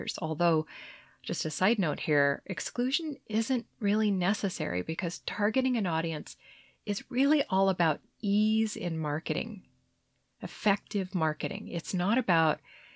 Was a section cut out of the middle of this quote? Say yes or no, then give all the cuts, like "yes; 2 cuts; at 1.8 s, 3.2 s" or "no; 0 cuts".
no; 0 cuts